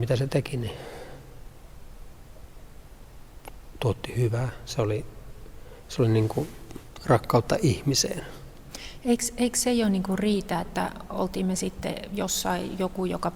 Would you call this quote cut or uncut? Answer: uncut